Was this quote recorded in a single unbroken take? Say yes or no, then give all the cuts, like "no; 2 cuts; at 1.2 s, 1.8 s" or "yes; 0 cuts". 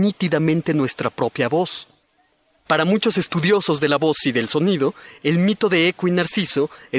yes; 0 cuts